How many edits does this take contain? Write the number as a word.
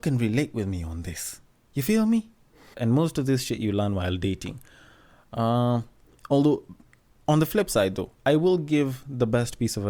one